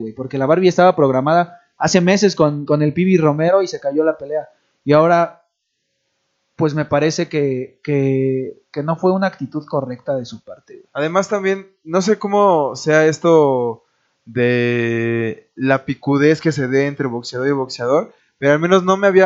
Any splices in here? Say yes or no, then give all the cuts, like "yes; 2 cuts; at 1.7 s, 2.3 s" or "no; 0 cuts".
no; 0 cuts